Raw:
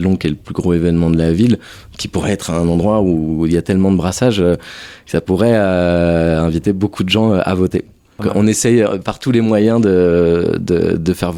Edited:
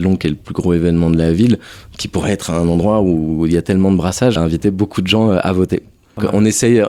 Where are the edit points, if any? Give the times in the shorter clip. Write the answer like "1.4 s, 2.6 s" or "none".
4.4 s